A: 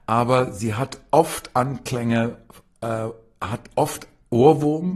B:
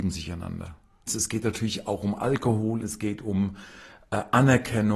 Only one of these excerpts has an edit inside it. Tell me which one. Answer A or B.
B